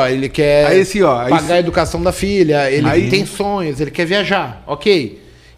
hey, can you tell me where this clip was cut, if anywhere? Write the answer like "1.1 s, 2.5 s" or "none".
none